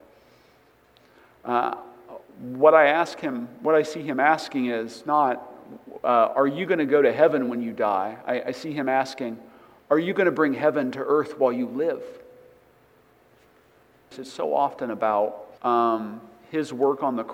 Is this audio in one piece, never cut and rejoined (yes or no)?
no